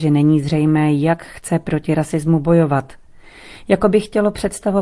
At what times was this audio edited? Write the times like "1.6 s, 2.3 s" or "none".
none